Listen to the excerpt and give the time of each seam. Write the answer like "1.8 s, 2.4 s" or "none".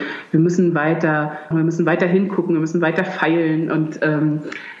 1.5 s